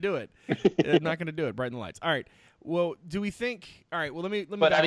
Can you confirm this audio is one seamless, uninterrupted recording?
yes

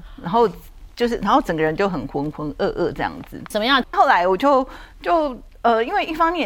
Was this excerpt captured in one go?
no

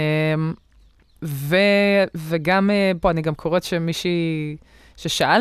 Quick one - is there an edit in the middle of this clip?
yes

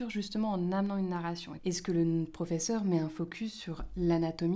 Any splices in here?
yes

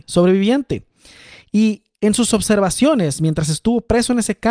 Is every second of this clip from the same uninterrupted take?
yes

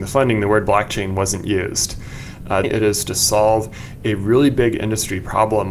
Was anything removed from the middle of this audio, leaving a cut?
yes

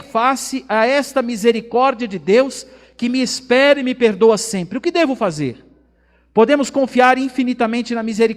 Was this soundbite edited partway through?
no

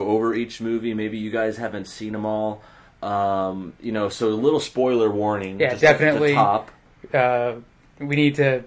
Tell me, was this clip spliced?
no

